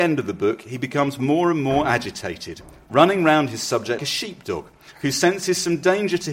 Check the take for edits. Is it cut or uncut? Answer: cut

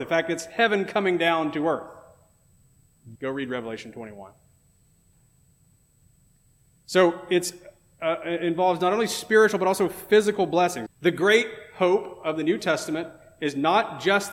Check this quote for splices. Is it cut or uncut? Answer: cut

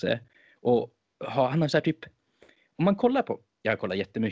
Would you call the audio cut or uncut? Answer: uncut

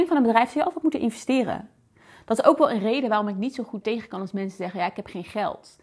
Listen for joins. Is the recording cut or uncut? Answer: cut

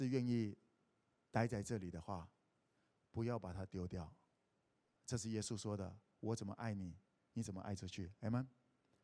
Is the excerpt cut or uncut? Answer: uncut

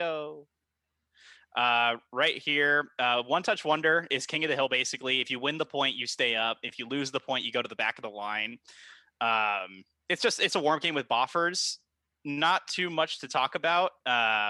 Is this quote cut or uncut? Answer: cut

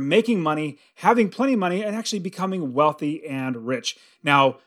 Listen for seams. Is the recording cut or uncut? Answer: uncut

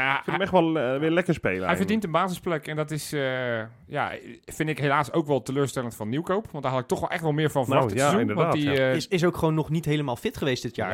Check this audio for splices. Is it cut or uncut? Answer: uncut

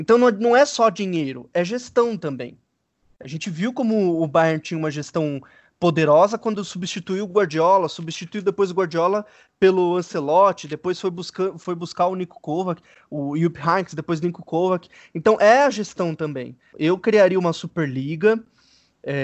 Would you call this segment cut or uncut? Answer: cut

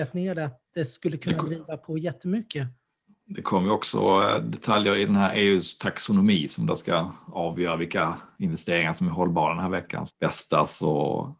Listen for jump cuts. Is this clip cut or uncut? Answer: cut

